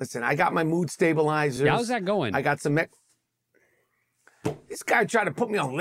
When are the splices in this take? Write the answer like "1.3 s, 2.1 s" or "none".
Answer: none